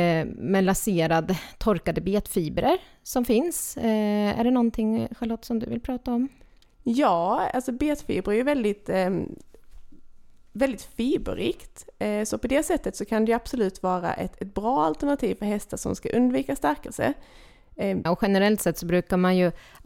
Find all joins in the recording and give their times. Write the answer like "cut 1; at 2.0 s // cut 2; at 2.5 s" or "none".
cut 1; at 18.1 s